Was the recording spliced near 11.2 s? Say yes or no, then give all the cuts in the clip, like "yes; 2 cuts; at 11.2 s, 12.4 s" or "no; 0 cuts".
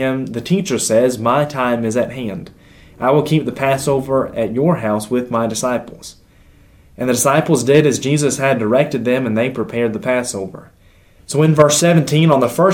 yes; 1 cut; at 11.2 s